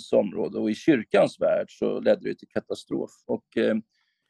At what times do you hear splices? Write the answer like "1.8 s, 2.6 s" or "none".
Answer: 3.2 s